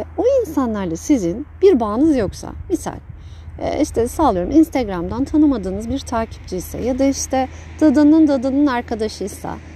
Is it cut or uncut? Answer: uncut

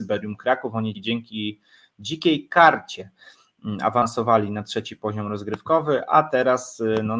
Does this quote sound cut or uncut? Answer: cut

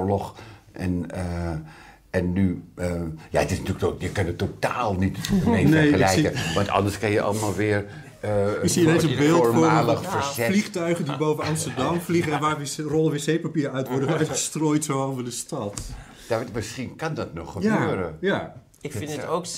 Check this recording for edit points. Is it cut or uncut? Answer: uncut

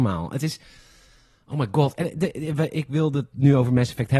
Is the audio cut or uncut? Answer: uncut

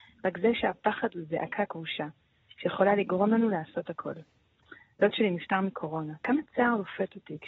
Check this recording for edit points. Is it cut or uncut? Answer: uncut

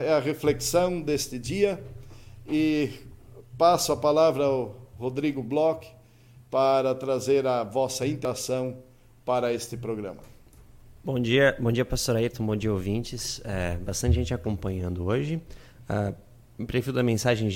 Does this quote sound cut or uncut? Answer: uncut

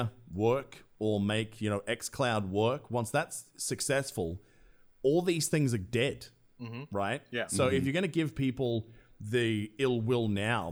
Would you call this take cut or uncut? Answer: uncut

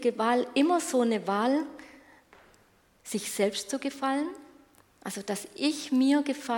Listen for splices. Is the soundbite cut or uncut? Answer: uncut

